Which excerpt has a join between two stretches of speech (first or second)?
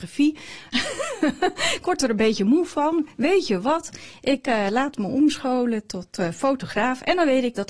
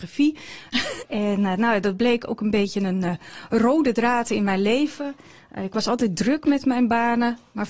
second